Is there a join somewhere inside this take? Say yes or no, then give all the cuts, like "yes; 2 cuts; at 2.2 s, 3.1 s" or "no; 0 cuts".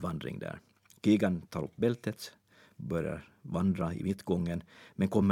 no; 0 cuts